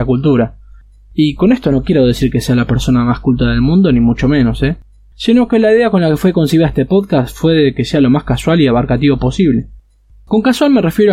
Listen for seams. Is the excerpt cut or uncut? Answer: uncut